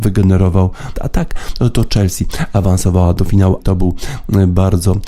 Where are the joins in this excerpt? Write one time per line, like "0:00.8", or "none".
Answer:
0:00.9
0:03.6

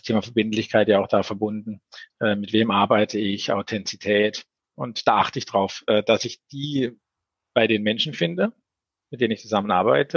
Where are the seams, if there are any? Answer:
0:02.1
0:04.6

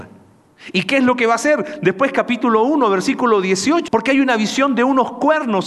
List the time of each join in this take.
0:03.9

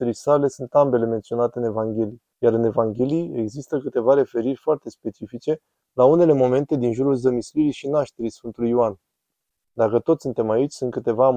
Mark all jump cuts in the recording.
0:02.3
0:09.7

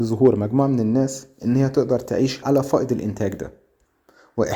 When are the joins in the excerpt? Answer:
0:02.4

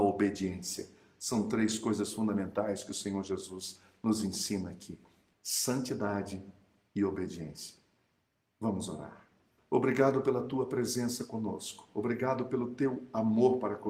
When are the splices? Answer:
0:05.3
0:09.6

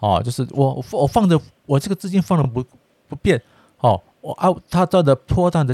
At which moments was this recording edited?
none

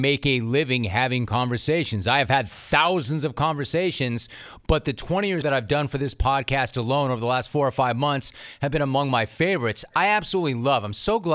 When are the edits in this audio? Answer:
0:05.4

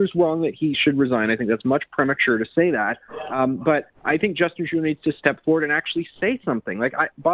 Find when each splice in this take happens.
none

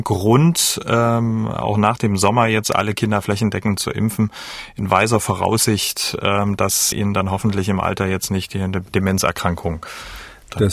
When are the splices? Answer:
0:06.9

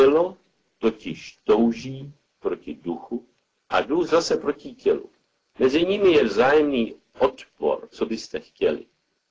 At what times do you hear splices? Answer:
0:07.9

